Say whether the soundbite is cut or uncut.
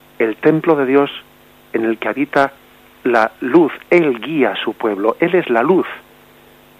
uncut